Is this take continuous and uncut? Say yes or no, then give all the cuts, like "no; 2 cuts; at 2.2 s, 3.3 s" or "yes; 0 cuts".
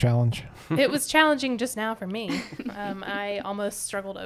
yes; 0 cuts